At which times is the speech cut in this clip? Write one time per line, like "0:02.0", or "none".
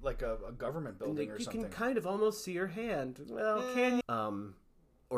0:04.0